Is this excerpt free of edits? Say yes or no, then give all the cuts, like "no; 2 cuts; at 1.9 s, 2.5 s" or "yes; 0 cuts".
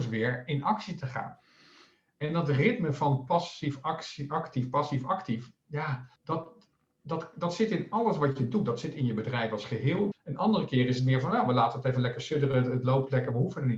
no; 2 cuts; at 6.2 s, 10.1 s